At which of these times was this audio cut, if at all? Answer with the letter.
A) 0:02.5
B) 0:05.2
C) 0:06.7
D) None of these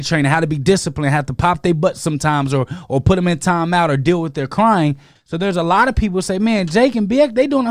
B